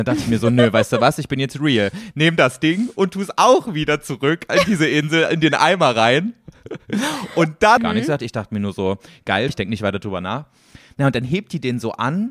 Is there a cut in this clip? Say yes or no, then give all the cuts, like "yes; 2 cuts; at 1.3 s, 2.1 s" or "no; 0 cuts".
yes; 2 cuts; at 7.8 s, 9.5 s